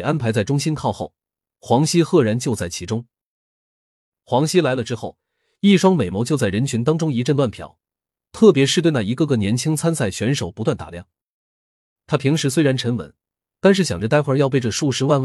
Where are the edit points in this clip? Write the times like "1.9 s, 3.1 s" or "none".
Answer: 1.4 s, 12.0 s

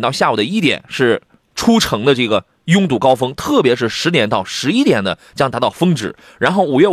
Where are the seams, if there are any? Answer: none

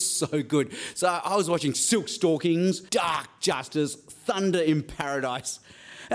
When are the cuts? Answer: 2.9 s

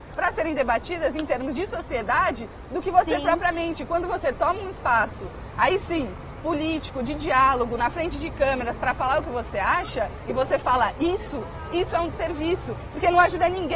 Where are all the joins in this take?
none

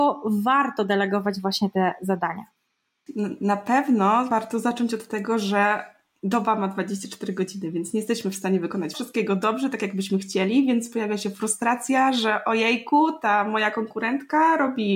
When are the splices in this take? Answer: 8.9 s

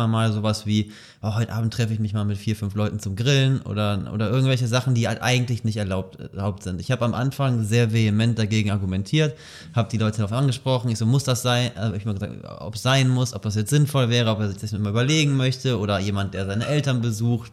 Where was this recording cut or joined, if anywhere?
none

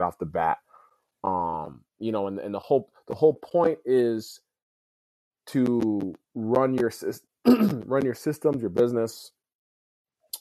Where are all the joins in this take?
1.9 s, 6.2 s

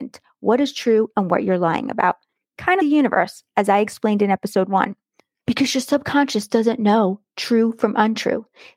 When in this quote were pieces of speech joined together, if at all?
2.8 s

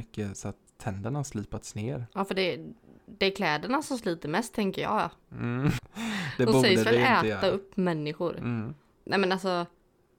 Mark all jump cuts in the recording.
5.8 s, 9.0 s

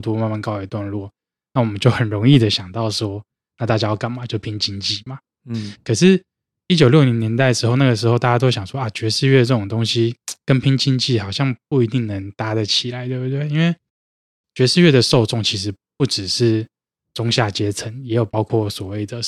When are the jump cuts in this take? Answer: none

